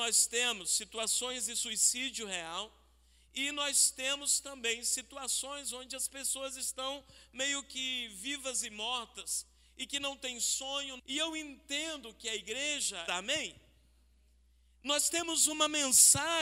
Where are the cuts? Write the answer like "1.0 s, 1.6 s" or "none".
11.0 s, 13.1 s